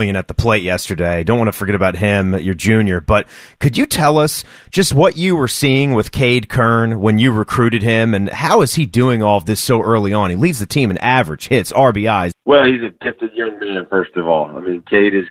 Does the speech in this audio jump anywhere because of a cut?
yes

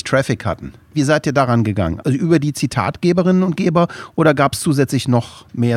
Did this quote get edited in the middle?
no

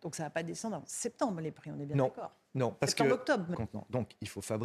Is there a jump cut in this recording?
yes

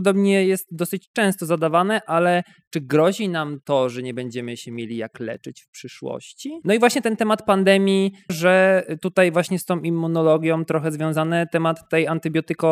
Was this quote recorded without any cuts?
no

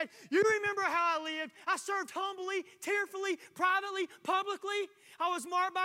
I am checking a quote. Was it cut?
no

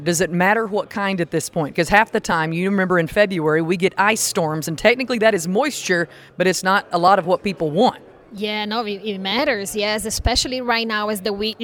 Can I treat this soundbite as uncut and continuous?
yes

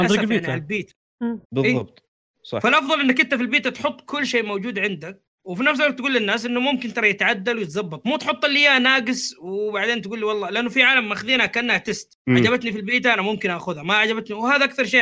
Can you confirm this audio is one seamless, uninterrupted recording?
no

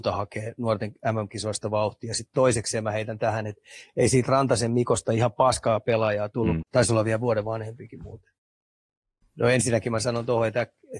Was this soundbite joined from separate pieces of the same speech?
yes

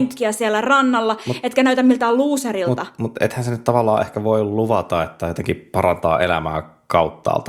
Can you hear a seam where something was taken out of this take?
no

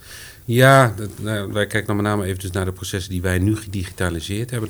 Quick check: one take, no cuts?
yes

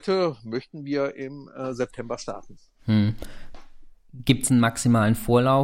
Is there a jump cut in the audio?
no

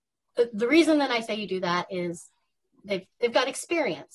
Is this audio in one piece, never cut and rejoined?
yes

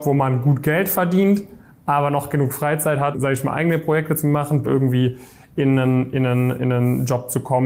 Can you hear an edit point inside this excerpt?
yes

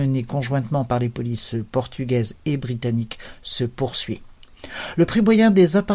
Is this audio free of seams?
yes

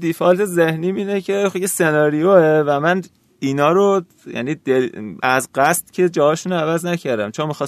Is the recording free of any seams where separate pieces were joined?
yes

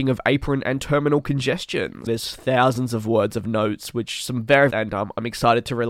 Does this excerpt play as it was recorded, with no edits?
no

